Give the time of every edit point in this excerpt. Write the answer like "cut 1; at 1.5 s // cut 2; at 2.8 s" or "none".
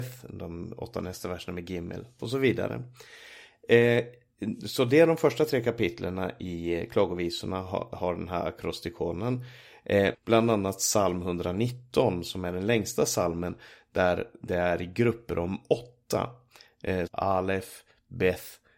cut 1; at 10.1 s // cut 2; at 17.1 s

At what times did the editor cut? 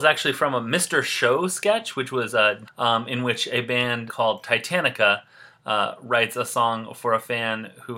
cut 1; at 2.6 s // cut 2; at 4.1 s

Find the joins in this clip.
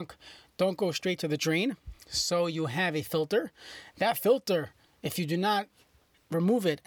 none

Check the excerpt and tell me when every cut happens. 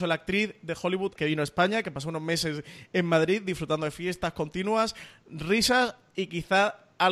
cut 1; at 1.2 s

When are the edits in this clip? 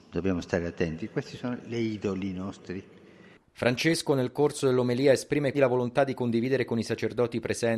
cut 1; at 5.5 s

